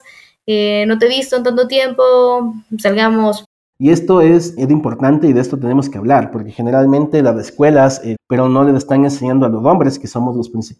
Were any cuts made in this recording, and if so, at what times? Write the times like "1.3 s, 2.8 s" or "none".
4.6 s, 8.1 s